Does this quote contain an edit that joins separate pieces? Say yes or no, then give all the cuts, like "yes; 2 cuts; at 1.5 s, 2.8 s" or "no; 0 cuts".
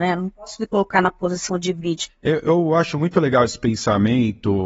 yes; 1 cut; at 2.1 s